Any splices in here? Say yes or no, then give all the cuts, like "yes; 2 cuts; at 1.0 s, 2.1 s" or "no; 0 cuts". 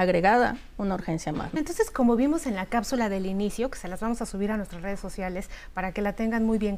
yes; 1 cut; at 1.6 s